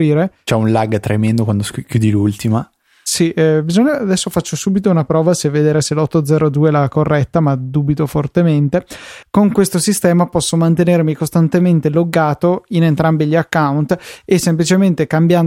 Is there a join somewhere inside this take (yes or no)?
yes